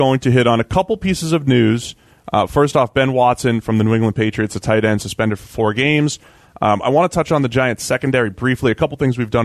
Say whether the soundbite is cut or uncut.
uncut